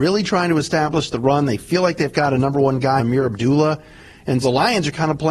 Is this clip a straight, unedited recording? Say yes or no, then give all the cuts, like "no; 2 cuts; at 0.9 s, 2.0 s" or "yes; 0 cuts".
no; 2 cuts; at 3.0 s, 4.4 s